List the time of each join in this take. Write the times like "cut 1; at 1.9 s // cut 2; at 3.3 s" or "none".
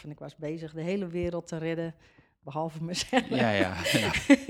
none